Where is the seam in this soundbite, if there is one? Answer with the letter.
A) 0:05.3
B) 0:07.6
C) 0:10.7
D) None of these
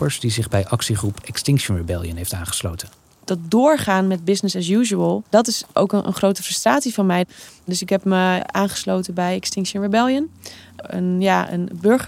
A